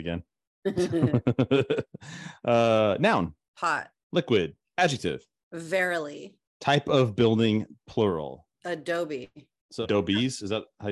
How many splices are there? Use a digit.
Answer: 2